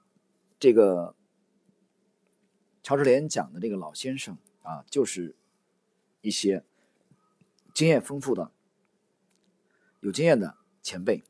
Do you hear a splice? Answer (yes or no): no